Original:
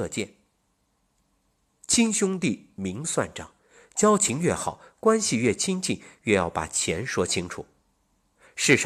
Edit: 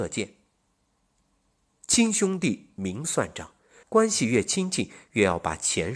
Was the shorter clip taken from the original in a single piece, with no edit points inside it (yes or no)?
no